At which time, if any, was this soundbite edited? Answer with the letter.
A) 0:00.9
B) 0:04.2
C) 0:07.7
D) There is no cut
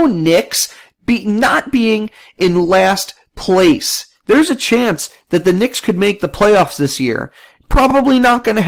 D